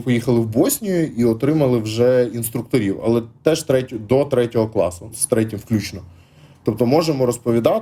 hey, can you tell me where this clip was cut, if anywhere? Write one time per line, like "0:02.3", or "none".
0:05.1